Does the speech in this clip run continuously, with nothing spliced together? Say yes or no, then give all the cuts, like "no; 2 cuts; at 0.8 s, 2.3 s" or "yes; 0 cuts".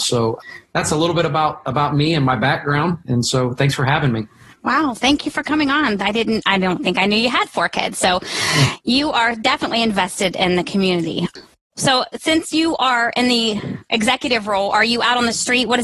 yes; 0 cuts